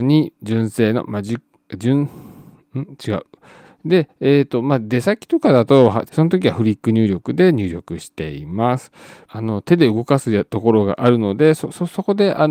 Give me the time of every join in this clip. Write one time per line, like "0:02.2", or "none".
0:03.6
0:06.1
0:09.3